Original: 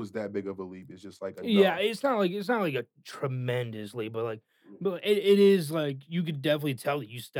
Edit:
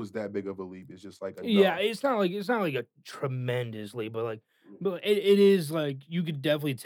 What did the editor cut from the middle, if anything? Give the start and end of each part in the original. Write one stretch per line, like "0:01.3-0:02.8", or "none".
none